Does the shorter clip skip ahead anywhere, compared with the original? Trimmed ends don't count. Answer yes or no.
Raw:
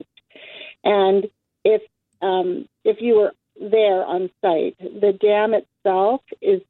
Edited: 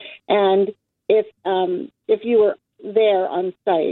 yes